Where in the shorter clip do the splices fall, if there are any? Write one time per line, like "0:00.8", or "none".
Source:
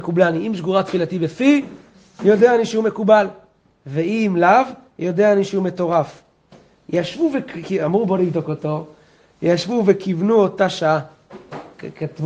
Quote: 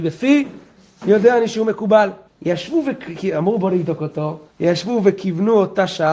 0:02.3
0:04.5

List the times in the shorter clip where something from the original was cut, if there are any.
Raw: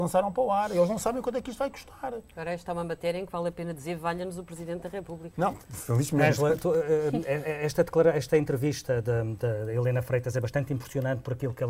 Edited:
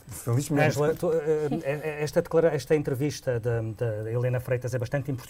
none

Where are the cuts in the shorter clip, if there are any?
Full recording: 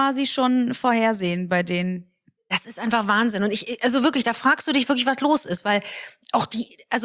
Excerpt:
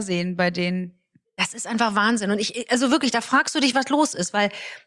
0:03.7

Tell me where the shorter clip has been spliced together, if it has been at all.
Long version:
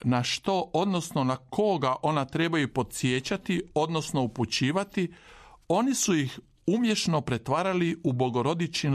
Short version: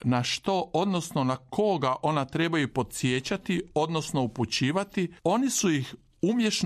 0:05.2

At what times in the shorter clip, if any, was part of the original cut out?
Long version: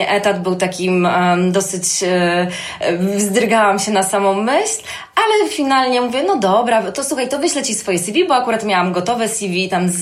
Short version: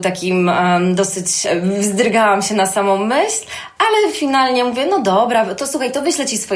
0:01.4

